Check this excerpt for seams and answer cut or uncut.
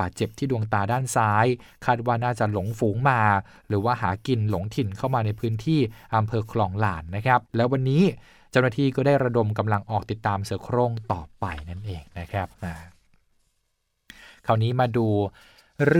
cut